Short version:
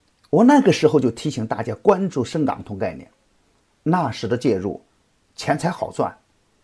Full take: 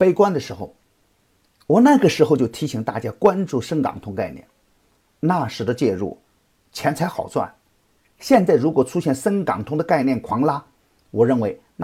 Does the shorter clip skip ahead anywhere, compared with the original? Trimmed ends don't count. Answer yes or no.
no